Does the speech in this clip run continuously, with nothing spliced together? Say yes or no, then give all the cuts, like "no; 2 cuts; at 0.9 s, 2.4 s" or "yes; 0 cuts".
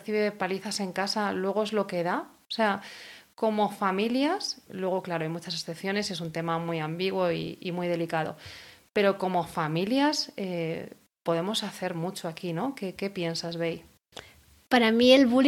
no; 1 cut; at 4.7 s